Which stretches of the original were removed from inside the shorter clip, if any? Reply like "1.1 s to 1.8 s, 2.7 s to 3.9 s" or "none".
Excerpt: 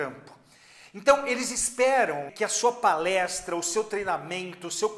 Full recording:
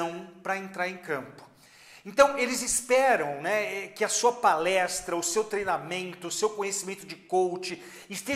3.4 s to 3.9 s